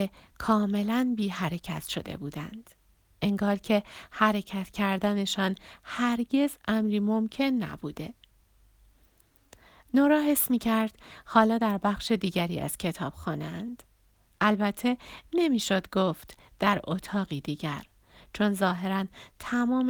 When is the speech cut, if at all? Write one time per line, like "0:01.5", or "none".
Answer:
none